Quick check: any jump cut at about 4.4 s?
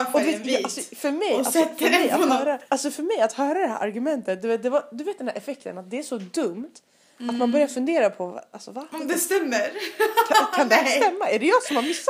no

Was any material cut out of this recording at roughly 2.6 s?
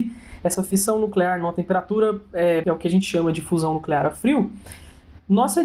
yes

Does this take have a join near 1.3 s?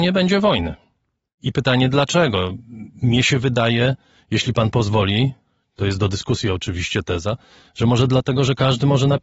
yes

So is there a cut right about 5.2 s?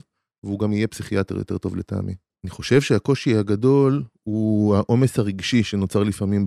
no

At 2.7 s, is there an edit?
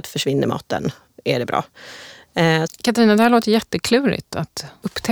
yes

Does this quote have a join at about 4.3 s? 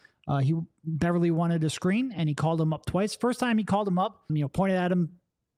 yes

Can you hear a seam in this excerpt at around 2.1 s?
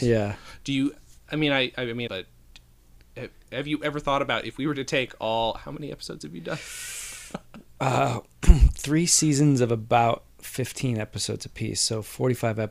yes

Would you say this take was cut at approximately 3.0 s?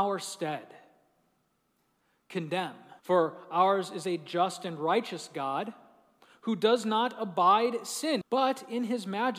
yes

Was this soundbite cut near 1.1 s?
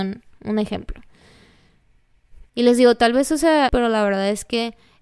no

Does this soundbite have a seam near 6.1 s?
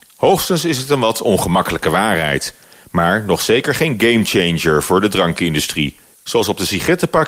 yes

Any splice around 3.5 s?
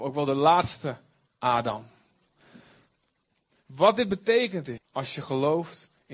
no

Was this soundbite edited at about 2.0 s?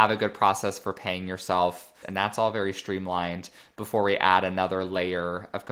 yes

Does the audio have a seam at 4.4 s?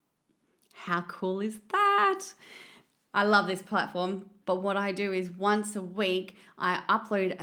yes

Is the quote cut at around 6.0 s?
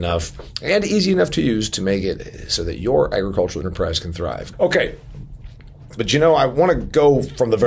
yes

